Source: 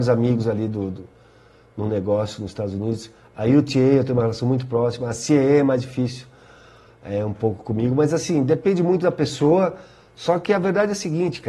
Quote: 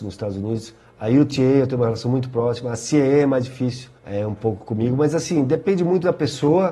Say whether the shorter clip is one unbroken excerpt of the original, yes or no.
no